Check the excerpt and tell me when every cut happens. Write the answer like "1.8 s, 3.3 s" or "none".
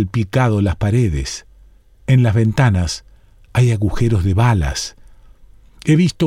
none

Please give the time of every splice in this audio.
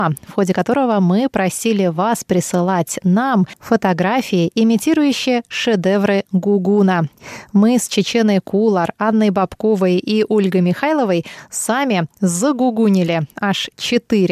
none

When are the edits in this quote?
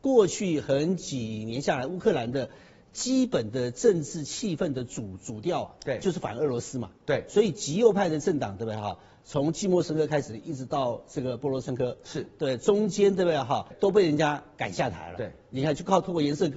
13.7 s

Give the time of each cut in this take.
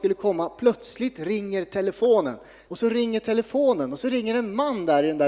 2.7 s

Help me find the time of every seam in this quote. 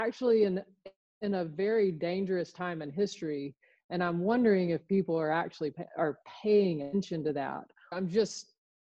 7.9 s

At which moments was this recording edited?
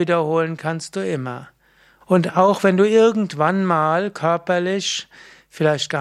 2.0 s

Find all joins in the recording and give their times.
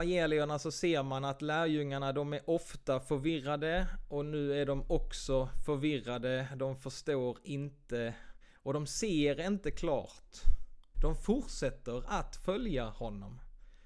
10.9 s

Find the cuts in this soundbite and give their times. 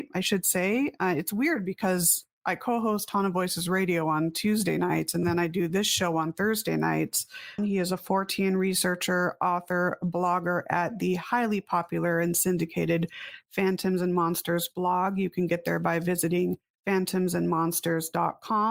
7.6 s

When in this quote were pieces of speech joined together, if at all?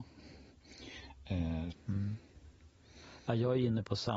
1.7 s

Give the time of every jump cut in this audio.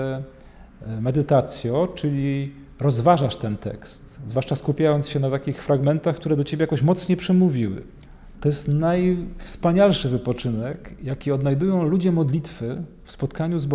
8.3 s

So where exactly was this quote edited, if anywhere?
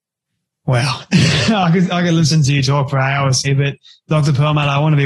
3.4 s

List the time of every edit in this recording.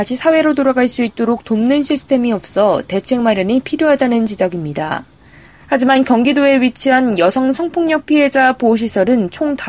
5.5 s

